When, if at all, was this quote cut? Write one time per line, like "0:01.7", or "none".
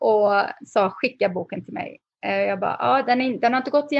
none